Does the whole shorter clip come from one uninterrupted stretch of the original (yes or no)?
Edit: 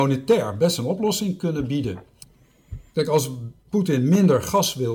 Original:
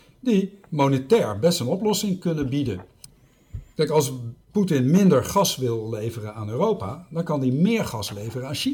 yes